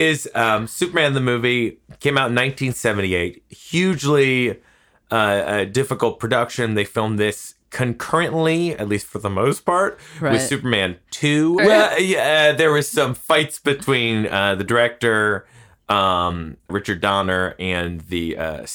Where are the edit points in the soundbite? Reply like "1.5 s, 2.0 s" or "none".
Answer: 11.6 s, 16.7 s